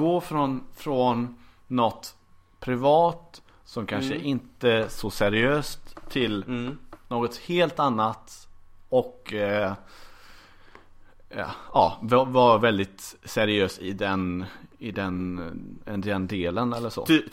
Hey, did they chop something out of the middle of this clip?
no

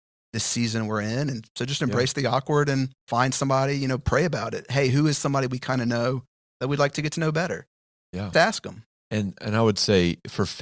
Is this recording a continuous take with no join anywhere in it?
no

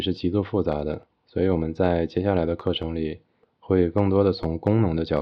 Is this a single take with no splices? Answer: yes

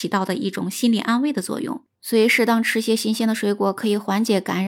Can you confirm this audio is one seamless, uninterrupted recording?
no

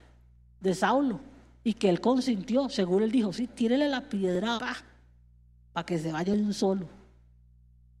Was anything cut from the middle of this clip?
yes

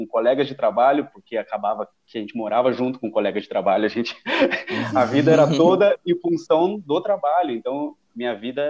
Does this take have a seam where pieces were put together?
no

